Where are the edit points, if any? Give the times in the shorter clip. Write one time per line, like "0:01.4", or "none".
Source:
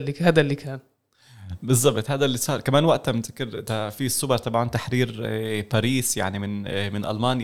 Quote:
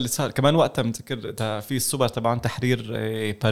none